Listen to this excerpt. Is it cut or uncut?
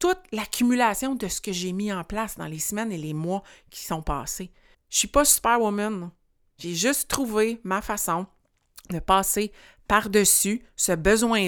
cut